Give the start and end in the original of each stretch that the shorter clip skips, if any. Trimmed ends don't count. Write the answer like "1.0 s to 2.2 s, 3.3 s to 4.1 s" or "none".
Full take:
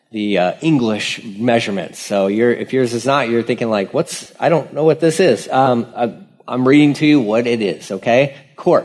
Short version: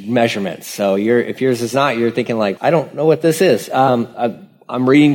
3.9 s to 4.4 s